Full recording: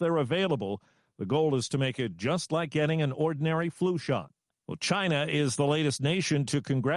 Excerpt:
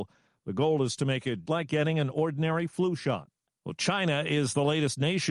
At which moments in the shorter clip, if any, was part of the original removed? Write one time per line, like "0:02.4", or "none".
0:01.5